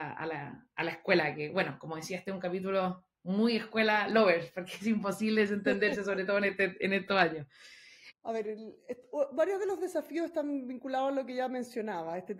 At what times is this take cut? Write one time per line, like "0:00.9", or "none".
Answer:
0:08.1